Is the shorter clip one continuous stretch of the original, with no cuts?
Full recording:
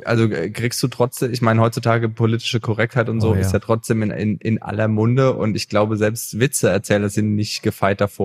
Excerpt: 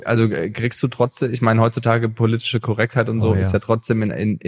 yes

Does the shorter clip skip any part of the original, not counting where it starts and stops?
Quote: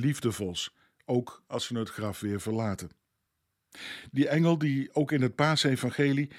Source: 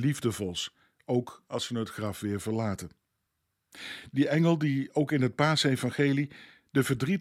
no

